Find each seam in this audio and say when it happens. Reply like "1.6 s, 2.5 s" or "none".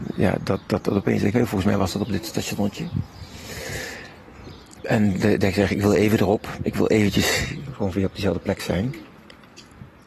4.7 s